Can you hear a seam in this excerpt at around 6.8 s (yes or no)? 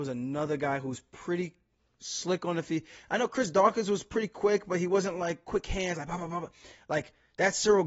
no